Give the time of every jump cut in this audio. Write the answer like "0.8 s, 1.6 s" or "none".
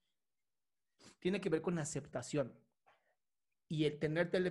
none